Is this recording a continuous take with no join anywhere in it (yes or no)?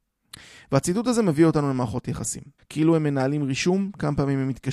no